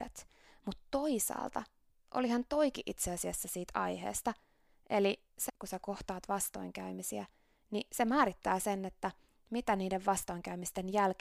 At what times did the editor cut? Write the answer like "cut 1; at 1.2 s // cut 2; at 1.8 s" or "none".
cut 1; at 5.5 s